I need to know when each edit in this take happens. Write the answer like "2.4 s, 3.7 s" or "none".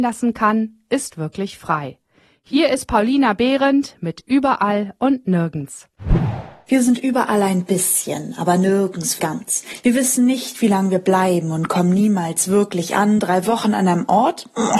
9.2 s